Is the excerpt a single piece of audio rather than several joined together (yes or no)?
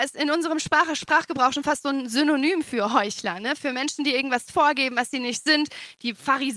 yes